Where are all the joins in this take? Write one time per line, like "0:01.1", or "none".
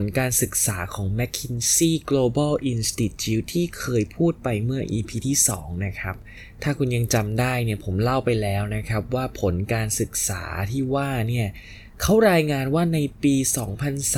none